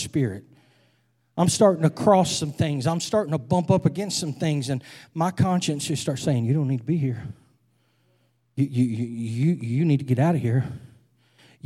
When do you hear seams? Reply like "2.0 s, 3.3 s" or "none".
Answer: none